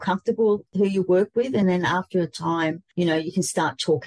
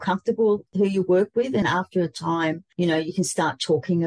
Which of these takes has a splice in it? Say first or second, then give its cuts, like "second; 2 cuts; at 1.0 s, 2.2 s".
second; 1 cut; at 1.6 s